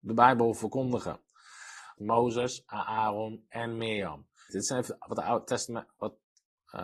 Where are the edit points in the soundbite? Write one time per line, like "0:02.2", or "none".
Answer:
0:02.0
0:04.5